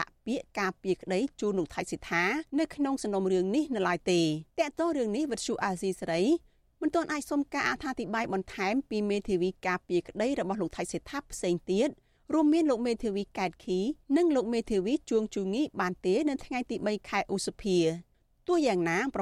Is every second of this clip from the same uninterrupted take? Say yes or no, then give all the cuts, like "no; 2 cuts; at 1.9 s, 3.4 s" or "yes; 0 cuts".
no; 3 cuts; at 2.5 s, 4.5 s, 14.0 s